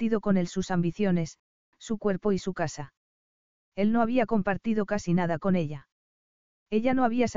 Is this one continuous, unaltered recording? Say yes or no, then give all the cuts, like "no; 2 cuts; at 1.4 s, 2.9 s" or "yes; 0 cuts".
no; 1 cut; at 1.7 s